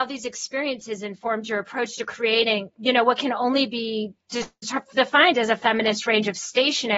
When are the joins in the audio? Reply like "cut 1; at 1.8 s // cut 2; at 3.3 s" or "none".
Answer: none